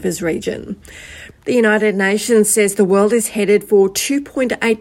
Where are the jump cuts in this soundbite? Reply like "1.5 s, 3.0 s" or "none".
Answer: 1.3 s